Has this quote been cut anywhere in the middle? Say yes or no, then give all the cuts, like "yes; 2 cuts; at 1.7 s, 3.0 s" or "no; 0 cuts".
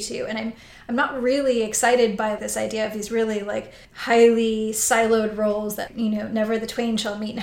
yes; 3 cuts; at 2.4 s, 3.8 s, 5.9 s